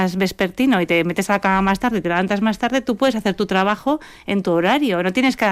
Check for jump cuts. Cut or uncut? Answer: uncut